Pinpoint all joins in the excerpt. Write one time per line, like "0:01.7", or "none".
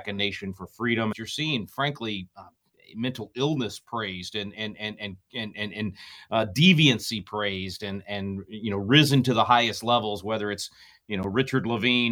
0:01.1